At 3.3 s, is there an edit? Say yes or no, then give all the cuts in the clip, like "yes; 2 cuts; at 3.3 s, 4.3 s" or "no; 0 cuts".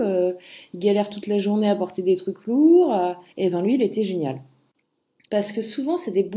yes; 2 cuts; at 3.3 s, 5.2 s